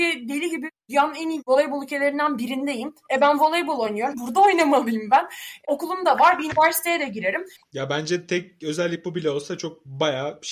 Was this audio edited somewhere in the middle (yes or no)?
yes